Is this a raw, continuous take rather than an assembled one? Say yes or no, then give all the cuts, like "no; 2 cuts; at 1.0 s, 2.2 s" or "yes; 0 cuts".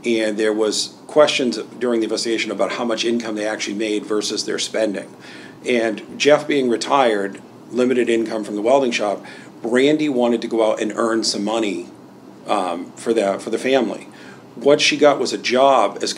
yes; 0 cuts